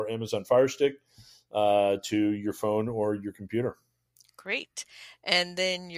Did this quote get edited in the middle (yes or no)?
no